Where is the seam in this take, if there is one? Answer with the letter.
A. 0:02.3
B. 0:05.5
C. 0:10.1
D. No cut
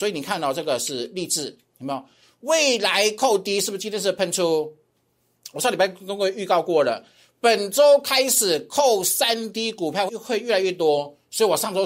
C